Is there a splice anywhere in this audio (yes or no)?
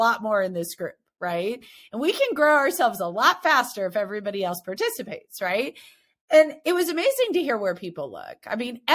no